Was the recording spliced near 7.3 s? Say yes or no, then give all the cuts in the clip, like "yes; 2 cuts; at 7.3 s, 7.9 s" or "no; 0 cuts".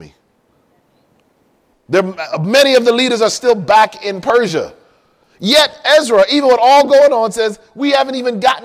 no; 1 cut; at 1.7 s